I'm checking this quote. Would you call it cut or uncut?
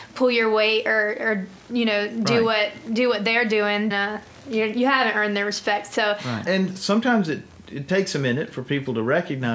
cut